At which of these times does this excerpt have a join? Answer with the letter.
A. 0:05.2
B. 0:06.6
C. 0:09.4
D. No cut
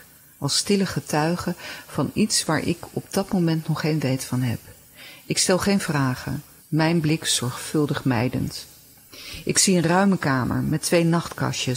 B